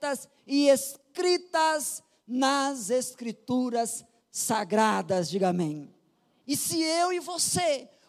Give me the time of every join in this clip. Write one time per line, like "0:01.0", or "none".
0:06.4